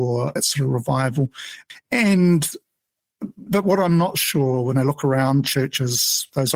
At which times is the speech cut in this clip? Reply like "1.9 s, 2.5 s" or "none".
3.5 s